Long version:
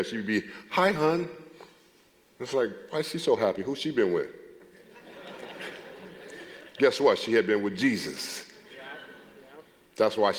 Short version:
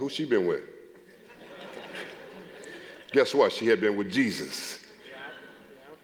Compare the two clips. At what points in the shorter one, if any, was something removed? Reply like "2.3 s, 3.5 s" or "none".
none